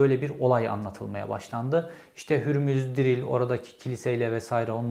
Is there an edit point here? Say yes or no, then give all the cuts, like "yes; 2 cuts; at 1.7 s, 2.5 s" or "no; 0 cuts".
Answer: no; 0 cuts